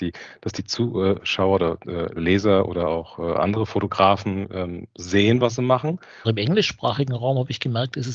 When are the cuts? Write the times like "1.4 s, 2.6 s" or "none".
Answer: 6.2 s